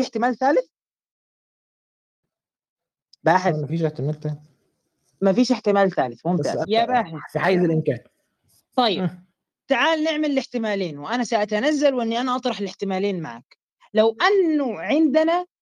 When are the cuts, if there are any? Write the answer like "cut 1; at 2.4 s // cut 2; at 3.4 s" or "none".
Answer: cut 1; at 6.6 s